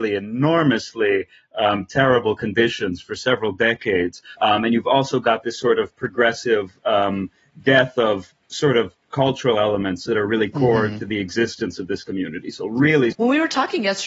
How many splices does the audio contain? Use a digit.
2